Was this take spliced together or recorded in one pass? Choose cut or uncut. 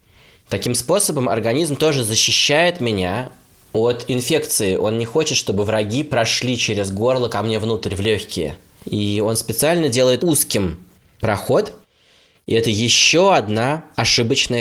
cut